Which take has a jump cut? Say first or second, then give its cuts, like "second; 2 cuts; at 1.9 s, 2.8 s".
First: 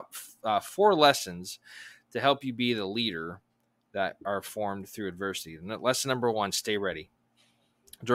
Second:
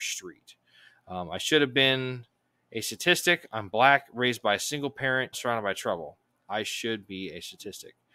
second; 1 cut; at 5.3 s